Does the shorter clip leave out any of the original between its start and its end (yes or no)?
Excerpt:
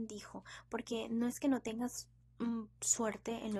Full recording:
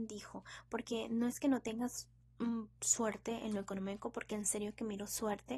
no